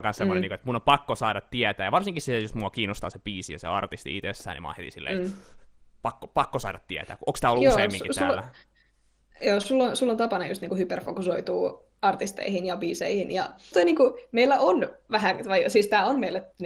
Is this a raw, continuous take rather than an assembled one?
no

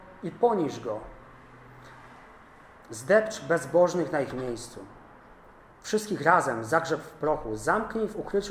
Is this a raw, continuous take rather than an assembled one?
yes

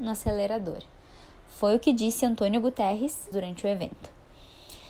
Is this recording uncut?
no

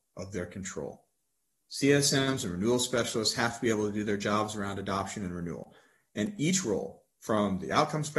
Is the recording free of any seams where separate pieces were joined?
yes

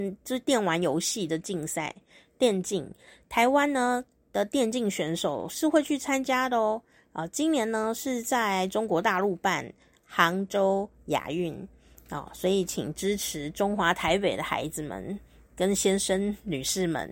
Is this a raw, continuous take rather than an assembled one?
yes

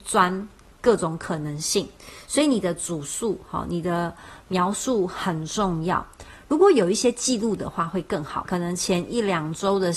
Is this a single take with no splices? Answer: no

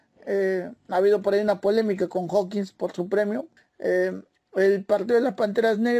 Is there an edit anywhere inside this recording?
yes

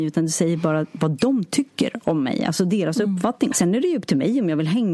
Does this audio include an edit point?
yes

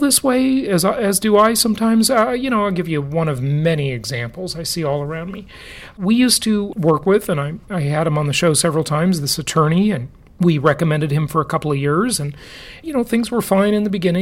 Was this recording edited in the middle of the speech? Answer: yes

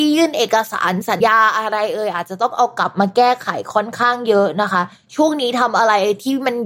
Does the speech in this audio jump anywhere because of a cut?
yes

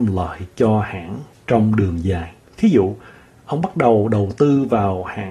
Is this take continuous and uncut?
no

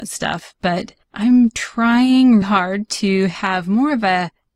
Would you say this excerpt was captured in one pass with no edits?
no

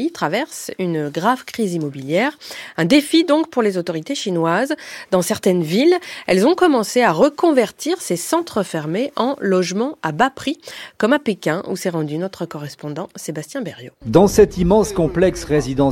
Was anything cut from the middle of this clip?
yes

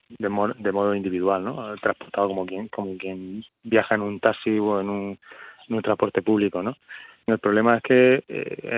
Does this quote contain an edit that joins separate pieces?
yes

